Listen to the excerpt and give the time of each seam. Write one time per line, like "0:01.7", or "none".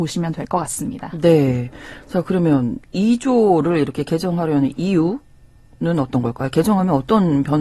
none